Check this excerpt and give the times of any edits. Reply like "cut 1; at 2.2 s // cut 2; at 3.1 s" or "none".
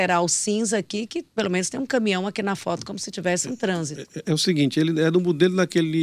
none

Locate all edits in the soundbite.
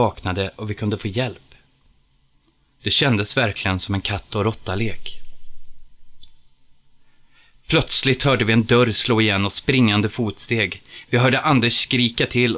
none

